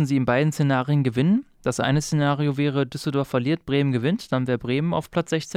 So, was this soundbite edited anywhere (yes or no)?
no